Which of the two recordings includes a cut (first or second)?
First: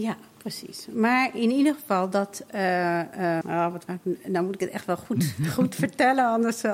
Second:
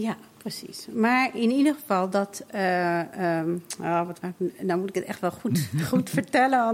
first